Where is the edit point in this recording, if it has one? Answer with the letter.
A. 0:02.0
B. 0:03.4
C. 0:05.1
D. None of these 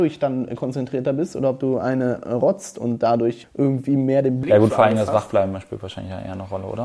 B